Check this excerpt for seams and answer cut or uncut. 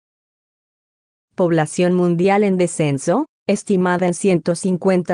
uncut